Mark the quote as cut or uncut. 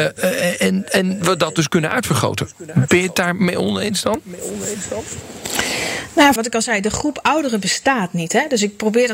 cut